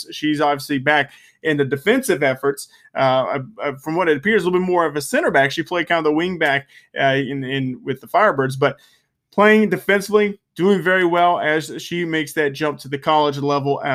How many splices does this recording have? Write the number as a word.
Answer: zero